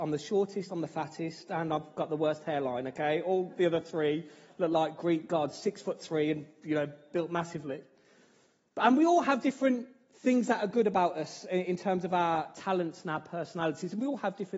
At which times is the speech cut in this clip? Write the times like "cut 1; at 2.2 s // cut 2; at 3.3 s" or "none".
none